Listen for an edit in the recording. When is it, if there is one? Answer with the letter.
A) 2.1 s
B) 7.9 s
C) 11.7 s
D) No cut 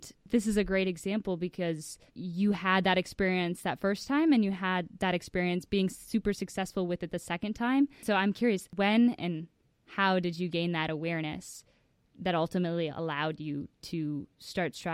A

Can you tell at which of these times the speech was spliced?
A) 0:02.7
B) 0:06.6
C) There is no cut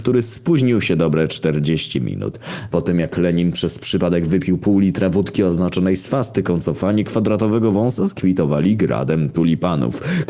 A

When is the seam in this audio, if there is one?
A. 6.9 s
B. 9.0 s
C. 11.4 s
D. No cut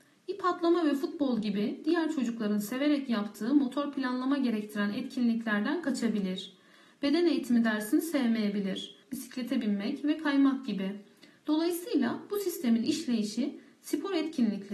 B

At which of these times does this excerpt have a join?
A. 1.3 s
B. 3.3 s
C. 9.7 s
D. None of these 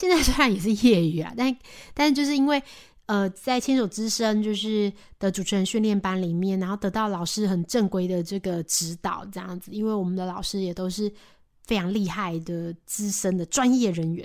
D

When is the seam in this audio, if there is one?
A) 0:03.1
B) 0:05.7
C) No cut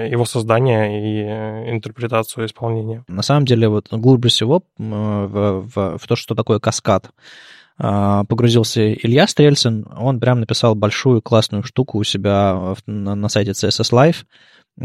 A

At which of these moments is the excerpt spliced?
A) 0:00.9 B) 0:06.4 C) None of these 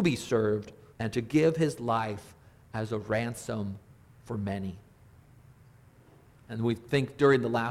A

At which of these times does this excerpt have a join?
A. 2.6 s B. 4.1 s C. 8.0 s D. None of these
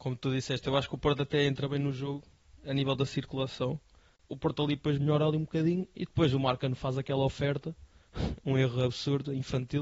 B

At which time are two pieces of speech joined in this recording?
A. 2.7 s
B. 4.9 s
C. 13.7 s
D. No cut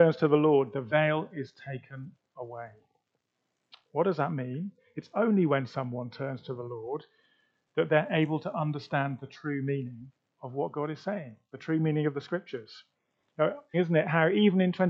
C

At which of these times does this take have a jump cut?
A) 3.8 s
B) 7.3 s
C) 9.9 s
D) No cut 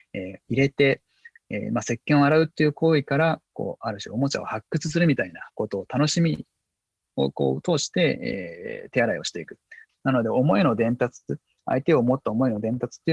C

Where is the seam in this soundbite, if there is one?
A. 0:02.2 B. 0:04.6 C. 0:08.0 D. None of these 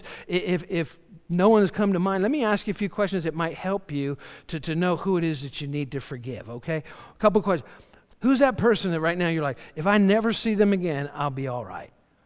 C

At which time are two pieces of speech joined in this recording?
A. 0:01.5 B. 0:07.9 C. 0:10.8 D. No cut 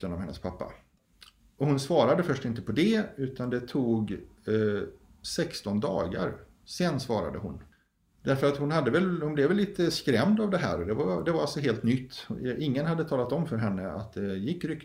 D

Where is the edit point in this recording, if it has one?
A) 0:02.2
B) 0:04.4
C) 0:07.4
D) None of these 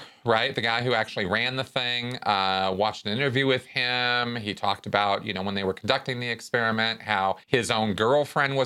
C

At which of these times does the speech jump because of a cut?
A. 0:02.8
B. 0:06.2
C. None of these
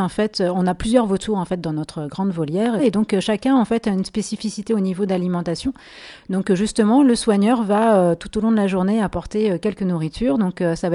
A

